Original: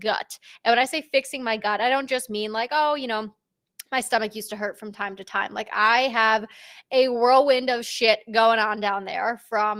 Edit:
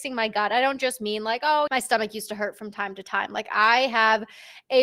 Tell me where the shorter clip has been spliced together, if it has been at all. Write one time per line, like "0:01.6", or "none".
0:01.7